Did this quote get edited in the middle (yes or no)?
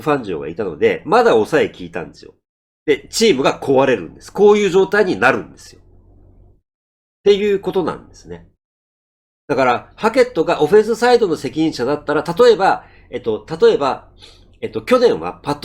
yes